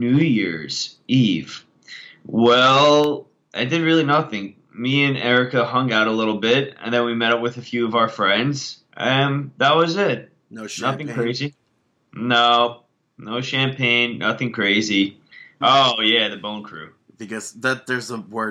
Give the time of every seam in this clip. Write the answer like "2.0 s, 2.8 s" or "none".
15.6 s